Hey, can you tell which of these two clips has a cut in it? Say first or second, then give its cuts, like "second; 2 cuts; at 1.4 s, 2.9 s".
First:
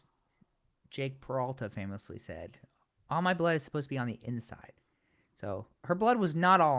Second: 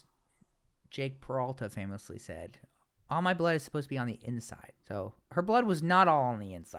second; 1 cut; at 4.8 s